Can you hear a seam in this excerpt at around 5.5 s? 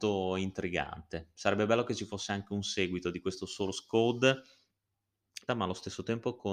yes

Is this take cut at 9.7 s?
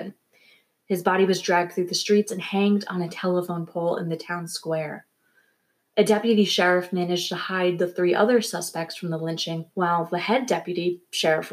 yes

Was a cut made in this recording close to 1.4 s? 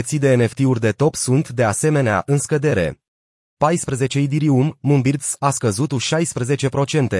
no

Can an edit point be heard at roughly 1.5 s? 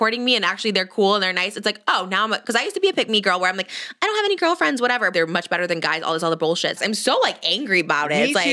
no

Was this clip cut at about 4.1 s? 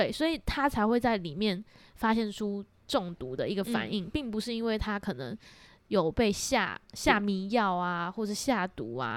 no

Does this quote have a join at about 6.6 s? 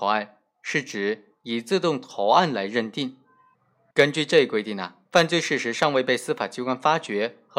no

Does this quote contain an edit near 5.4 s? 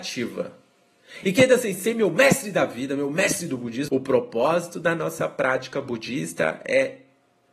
no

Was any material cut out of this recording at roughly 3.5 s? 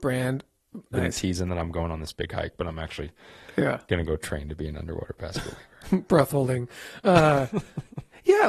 no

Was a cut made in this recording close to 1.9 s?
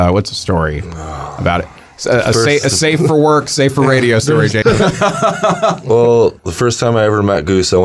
no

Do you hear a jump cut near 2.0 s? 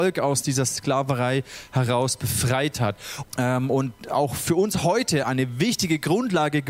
no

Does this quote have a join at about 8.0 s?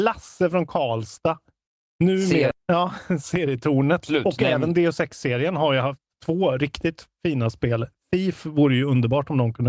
no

